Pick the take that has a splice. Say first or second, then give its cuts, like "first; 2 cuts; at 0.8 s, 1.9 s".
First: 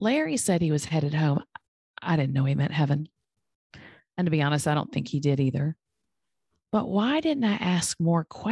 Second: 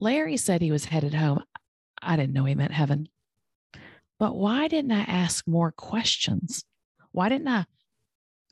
second; 1 cut; at 4.0 s